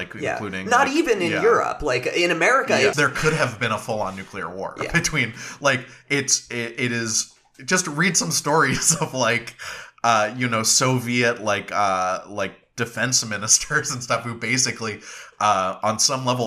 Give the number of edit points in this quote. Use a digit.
1